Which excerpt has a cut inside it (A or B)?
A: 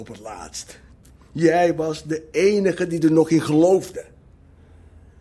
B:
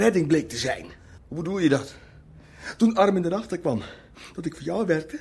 B